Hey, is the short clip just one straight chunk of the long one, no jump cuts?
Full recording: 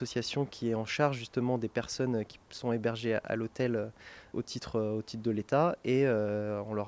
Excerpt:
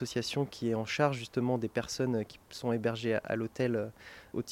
yes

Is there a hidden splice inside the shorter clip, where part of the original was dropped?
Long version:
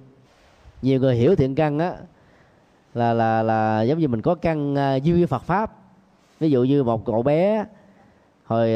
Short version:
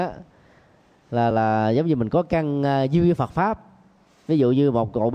yes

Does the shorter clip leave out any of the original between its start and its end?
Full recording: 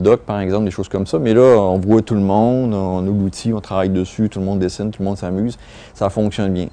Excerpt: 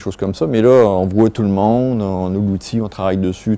no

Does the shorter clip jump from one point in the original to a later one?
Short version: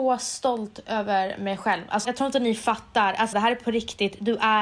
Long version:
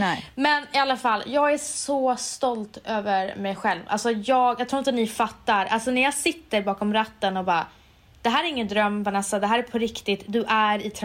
yes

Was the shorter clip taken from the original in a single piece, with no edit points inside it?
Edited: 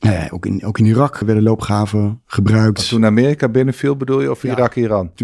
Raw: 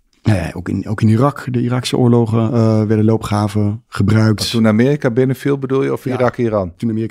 no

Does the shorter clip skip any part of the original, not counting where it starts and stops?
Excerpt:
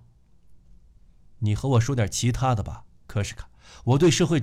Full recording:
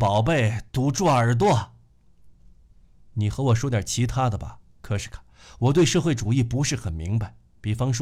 no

